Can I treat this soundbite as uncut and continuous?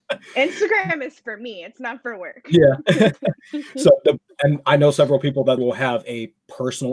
no; 1 cut; at 5.6 s

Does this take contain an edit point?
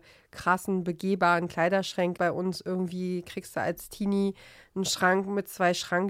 yes; 1 cut; at 2.2 s

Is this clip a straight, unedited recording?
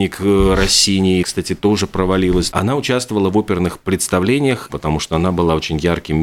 no; 3 cuts; at 1.2 s, 2.5 s, 4.7 s

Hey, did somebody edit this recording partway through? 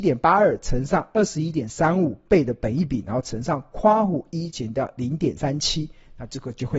yes; 1 cut; at 5.4 s

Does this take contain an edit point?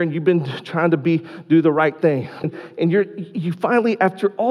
yes; 1 cut; at 2.4 s

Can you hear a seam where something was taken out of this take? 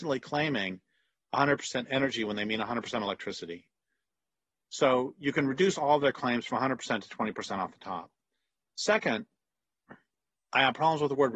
no; 0 cuts

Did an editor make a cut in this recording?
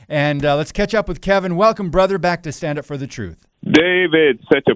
yes; 1 cut; at 3.5 s

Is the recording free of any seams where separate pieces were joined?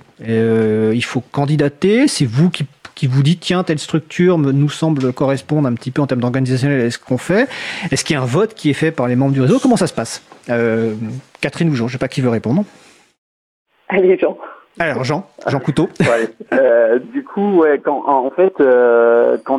yes; 0 cuts

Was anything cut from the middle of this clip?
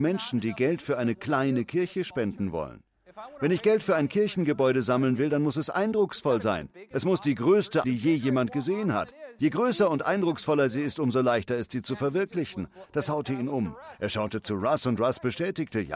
yes; 1 cut; at 7.8 s

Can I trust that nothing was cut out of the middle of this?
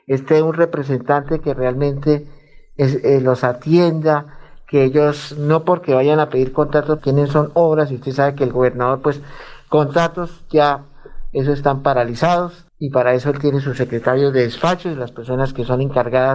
no; 2 cuts; at 7.0 s, 12.7 s

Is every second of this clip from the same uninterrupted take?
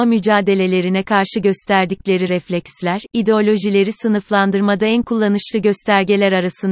yes; 0 cuts

